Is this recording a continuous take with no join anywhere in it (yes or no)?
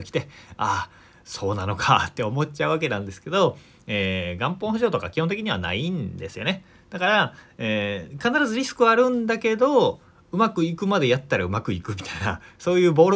yes